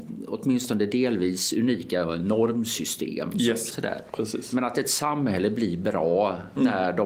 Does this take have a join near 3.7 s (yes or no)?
yes